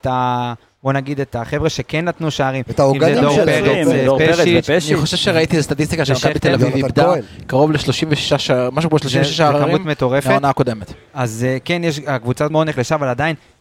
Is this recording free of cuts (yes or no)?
no